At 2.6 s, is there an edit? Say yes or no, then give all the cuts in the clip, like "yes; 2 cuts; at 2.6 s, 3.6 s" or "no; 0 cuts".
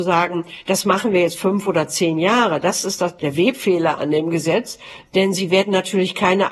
no; 0 cuts